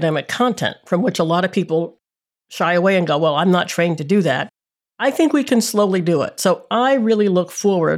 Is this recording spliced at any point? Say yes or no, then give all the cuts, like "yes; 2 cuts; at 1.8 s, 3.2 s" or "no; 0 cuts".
no; 0 cuts